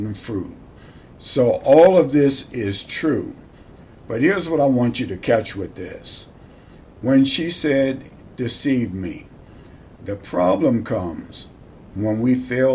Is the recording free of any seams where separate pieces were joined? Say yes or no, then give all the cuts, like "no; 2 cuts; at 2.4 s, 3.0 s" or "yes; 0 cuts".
yes; 0 cuts